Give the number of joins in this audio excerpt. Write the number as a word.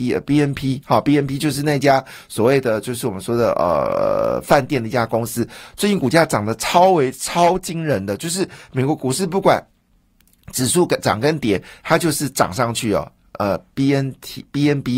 zero